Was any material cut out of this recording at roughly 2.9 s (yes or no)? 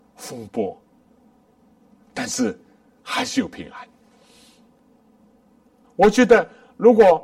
no